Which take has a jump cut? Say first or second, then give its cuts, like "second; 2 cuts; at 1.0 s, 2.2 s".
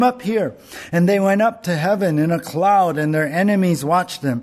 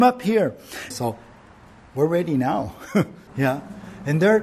second; 2 cuts; at 0.9 s, 3.3 s